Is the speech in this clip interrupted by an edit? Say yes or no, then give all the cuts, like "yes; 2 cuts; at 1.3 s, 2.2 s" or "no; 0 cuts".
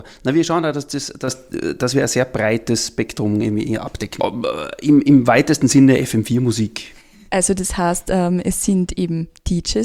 yes; 2 cuts; at 4.2 s, 7.3 s